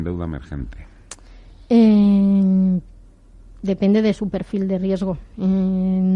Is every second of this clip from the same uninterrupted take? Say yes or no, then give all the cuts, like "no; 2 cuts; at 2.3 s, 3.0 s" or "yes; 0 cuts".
yes; 0 cuts